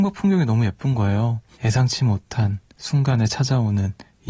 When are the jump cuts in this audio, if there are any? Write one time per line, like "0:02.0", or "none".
0:01.6